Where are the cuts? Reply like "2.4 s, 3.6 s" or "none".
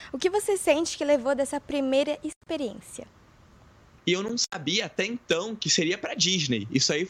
4.0 s